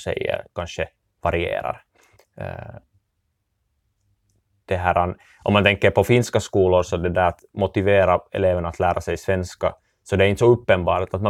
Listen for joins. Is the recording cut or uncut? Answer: uncut